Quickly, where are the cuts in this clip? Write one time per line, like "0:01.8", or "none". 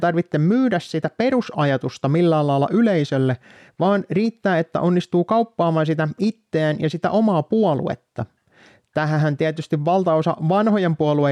none

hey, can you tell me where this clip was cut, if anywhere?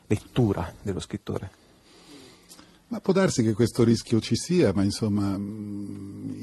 none

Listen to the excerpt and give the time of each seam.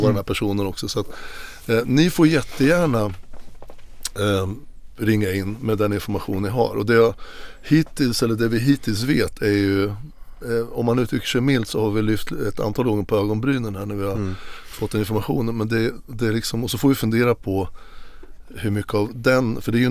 none

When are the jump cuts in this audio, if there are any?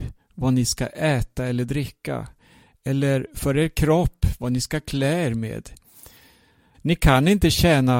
0:06.7

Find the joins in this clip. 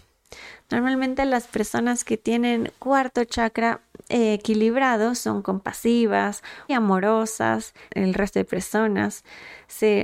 0:06.7
0:07.9

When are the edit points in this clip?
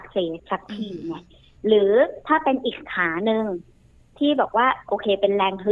none

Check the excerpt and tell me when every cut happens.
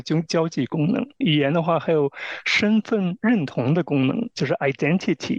0:01.2

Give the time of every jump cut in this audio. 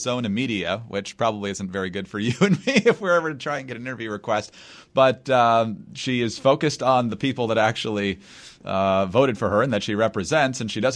none

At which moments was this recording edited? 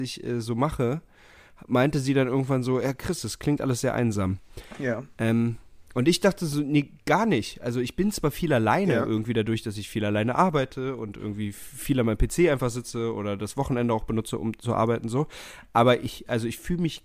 none

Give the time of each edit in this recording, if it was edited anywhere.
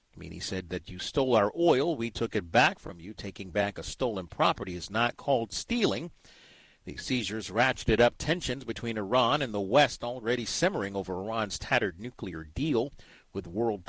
none

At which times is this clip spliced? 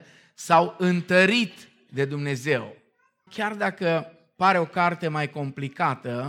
0:03.3

